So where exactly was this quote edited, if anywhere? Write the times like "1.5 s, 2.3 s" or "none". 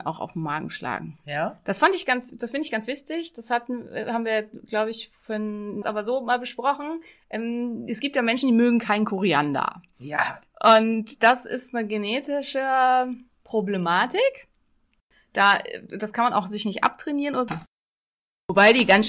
5.8 s, 17.5 s